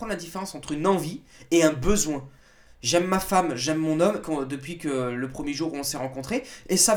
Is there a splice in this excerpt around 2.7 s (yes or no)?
yes